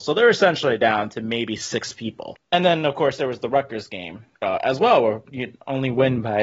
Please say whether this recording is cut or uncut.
cut